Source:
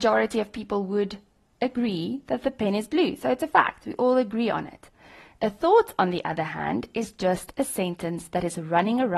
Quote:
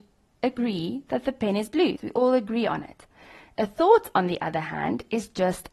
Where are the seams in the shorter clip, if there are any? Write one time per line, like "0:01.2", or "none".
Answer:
0:02.0